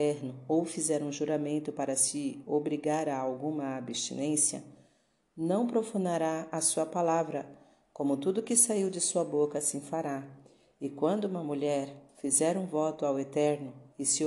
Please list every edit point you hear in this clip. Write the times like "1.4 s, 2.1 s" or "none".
none